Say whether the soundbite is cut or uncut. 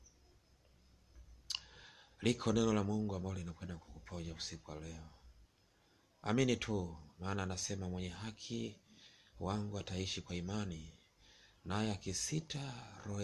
uncut